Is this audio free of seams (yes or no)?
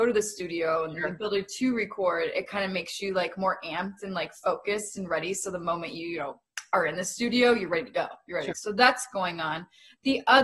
no